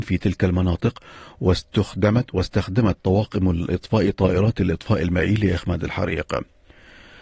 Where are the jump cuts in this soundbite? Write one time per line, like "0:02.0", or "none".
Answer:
none